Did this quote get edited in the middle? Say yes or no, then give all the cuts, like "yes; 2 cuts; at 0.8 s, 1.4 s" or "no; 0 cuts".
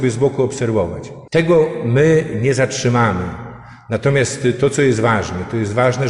yes; 1 cut; at 1.3 s